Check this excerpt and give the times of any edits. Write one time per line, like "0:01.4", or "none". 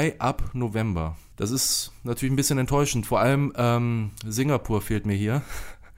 none